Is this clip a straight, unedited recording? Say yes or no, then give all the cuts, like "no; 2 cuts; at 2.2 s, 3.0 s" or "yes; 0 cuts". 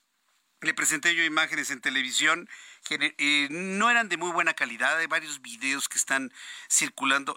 yes; 0 cuts